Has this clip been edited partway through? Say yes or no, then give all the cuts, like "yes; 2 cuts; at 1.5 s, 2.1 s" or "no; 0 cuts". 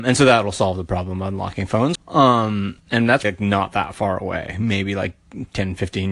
yes; 2 cuts; at 2.0 s, 3.2 s